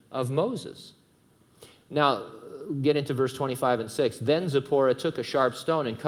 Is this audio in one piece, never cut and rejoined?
yes; 0 cuts

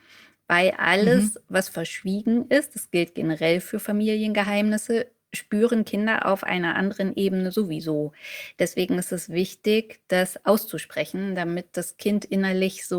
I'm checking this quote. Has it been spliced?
no; 0 cuts

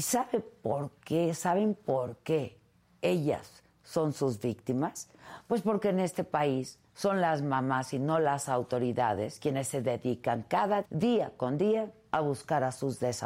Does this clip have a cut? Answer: yes; 1 cut; at 10.8 s

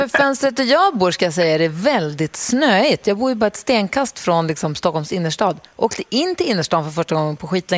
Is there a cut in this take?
no; 0 cuts

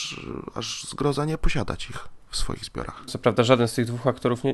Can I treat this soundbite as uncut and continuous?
no; 1 cut; at 3.1 s

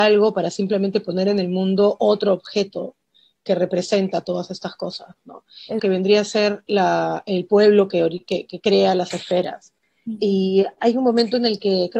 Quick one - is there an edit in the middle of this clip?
yes; 1 cut; at 5.8 s

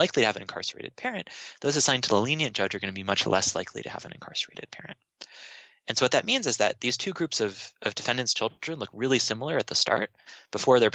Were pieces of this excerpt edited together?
no; 0 cuts

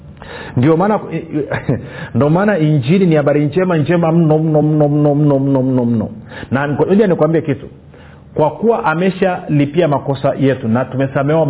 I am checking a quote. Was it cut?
no; 0 cuts

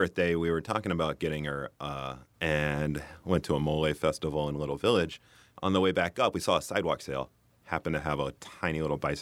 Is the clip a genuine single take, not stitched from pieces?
no; 1 cut; at 2.3 s

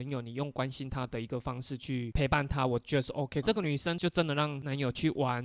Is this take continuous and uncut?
no; 1 cut; at 3.4 s

